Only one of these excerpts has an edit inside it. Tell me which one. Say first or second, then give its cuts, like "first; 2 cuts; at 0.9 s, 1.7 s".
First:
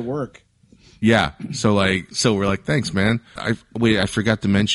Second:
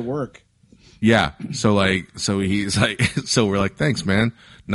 first; 2 cuts; at 2.1 s, 3.4 s